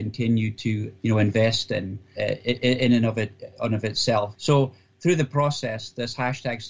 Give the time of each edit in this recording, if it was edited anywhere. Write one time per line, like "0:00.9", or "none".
0:01.0
0:02.1
0:04.3